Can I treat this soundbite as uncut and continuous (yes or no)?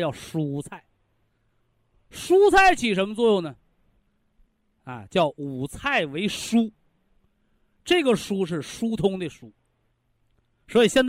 yes